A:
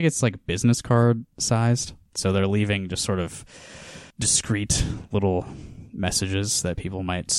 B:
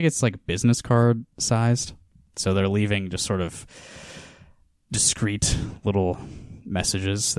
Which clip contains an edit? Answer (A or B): A